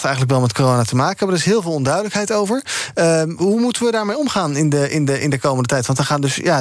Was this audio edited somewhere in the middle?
no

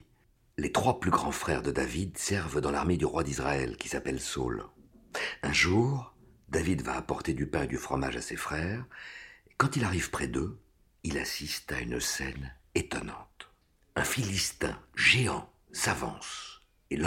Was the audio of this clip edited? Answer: no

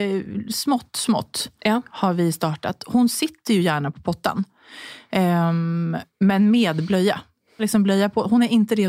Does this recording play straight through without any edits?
no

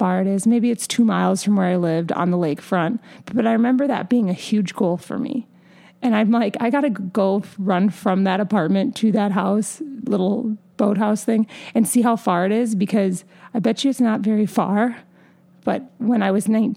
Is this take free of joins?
yes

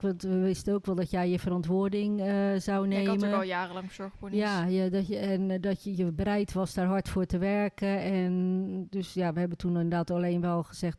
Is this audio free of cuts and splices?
yes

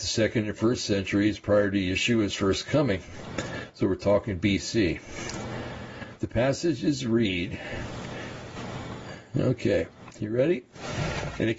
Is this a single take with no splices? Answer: yes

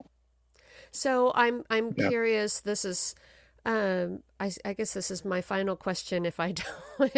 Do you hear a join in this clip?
no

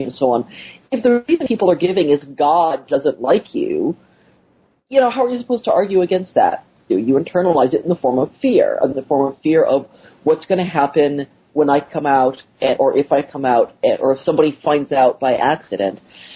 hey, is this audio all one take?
no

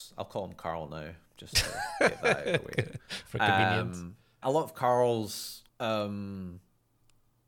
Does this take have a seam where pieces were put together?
yes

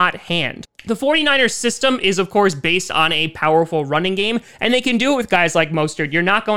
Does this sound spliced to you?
no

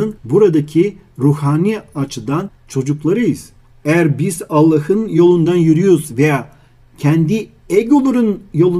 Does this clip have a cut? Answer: yes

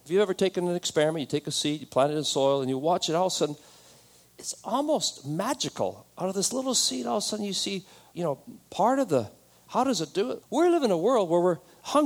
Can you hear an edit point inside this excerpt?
yes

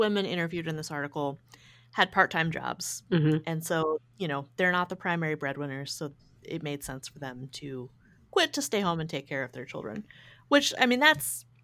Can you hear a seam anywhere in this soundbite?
no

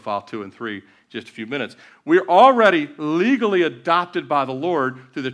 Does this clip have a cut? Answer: yes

